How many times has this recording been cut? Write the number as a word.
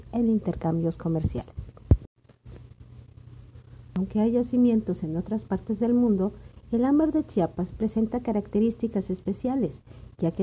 zero